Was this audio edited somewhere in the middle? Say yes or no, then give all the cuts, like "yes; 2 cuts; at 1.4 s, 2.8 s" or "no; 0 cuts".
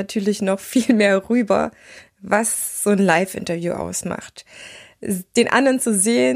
no; 0 cuts